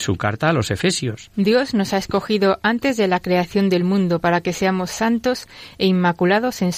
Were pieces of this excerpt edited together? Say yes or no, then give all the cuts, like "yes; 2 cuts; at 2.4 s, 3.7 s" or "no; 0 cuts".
yes; 1 cut; at 1.3 s